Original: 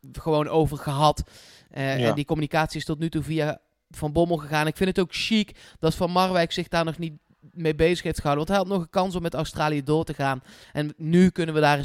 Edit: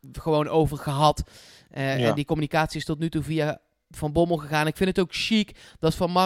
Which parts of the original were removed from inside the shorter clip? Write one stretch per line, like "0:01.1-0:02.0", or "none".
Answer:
none